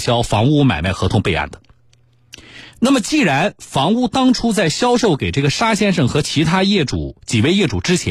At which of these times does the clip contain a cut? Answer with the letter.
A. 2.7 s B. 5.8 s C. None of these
C